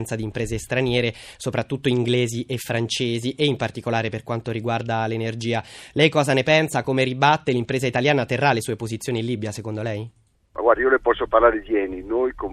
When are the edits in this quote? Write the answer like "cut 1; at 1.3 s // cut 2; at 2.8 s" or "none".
none

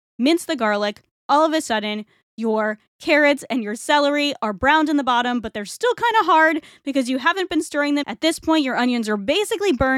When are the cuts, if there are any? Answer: cut 1; at 8.0 s

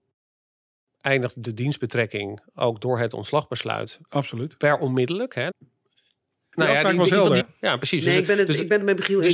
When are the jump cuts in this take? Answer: cut 1; at 5.5 s // cut 2; at 7.4 s

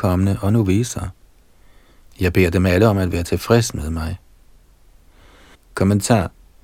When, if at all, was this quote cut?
cut 1; at 5.5 s

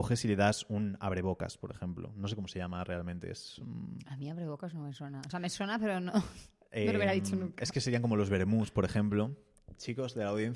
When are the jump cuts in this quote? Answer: none

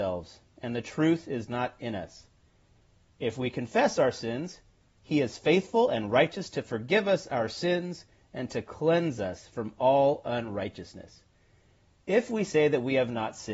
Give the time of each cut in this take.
none

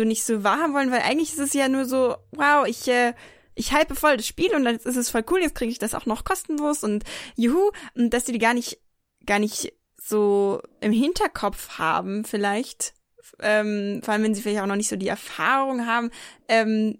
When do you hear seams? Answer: none

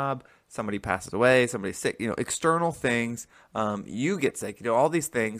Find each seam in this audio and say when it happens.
none

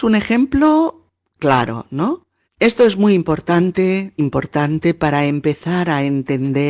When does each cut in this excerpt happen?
cut 1; at 2.4 s // cut 2; at 4.2 s

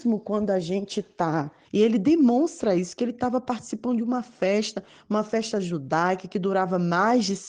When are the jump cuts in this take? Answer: cut 1; at 1.6 s

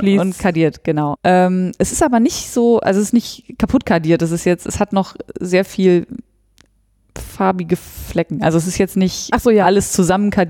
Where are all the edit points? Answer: cut 1; at 1.2 s

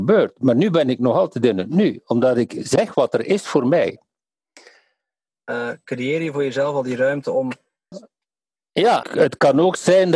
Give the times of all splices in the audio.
cut 1; at 5.3 s // cut 2; at 7.9 s // cut 3; at 9.0 s

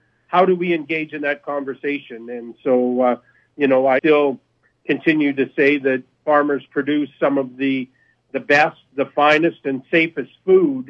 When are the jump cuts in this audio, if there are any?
cut 1; at 4.0 s

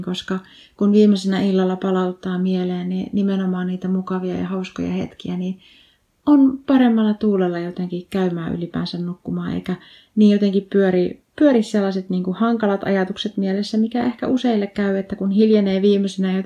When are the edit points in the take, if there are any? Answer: none

